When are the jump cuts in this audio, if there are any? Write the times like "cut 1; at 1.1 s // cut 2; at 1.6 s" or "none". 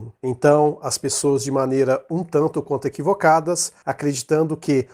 cut 1; at 3.8 s